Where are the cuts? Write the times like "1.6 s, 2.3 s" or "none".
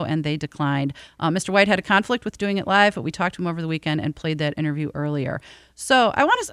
none